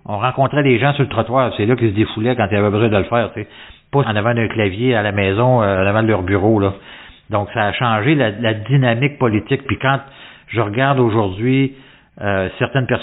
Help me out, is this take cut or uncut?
uncut